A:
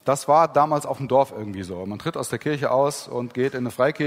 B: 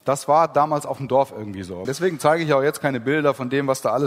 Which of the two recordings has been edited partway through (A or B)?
B